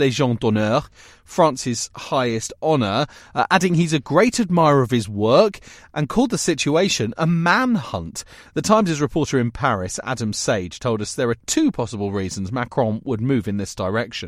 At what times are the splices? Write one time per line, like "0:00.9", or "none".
none